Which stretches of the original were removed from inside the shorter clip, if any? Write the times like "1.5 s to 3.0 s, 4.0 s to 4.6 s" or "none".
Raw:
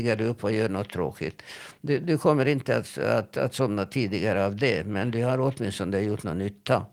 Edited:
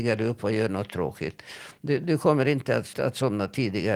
2.9 s to 3.3 s

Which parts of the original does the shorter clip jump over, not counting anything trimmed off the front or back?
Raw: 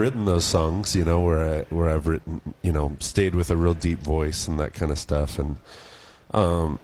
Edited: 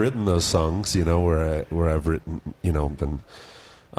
3.0 s to 5.4 s

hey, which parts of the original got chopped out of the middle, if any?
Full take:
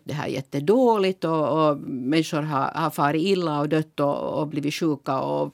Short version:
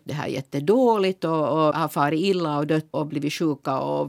1.7 s to 2.7 s, 4.0 s to 4.3 s

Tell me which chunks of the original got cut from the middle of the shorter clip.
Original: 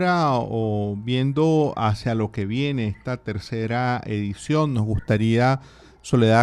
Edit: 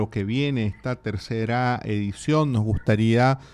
none

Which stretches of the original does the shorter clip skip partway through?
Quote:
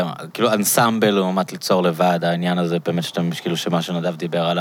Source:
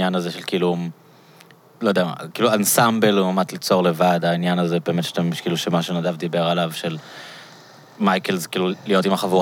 none

